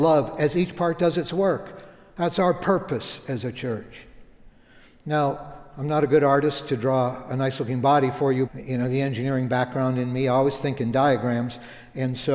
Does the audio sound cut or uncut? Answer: cut